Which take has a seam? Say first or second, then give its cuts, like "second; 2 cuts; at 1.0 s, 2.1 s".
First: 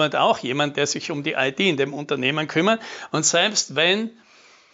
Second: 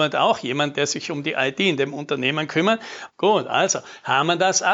second; 1 cut; at 3.1 s